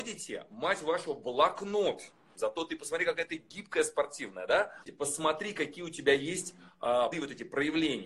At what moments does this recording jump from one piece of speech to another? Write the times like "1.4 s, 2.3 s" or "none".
2.3 s, 4.8 s, 7.1 s